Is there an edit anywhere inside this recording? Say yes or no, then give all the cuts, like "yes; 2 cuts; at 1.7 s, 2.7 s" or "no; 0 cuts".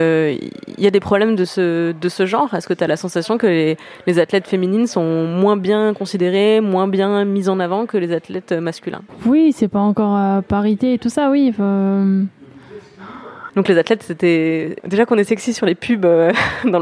yes; 2 cuts; at 13.5 s, 14.8 s